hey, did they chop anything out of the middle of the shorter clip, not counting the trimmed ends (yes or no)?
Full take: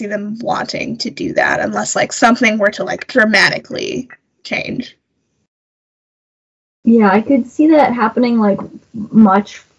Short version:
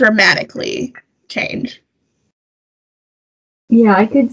no